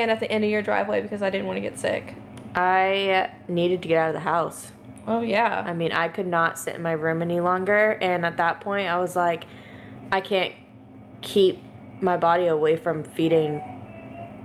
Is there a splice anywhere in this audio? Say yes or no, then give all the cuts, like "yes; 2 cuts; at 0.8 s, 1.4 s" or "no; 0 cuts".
no; 0 cuts